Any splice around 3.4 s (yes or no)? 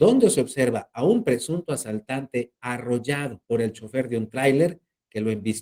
yes